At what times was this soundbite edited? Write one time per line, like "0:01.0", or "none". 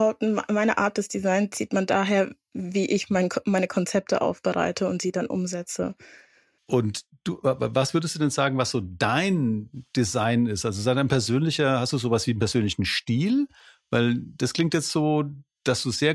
0:06.6